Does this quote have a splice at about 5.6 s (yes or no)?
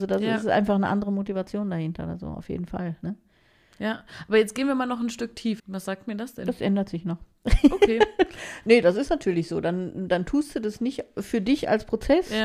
yes